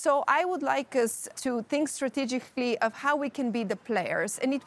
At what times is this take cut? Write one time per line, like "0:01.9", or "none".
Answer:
0:01.3